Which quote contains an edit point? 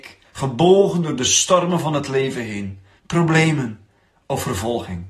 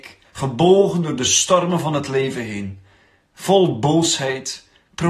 first; 1 cut; at 3.0 s

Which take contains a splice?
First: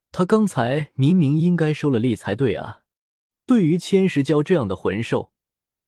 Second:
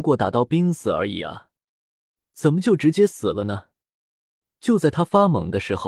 first; 1 cut; at 3.3 s

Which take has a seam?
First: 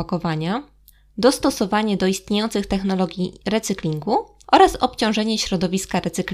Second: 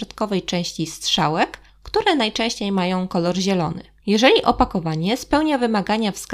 second; 1 cut; at 4.0 s

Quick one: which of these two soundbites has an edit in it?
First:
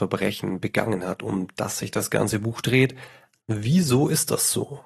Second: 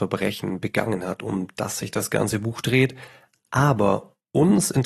first; 1 cut; at 3.4 s

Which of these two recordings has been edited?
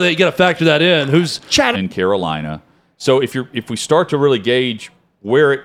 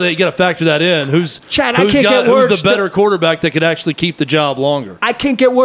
first; 1 cut; at 1.7 s

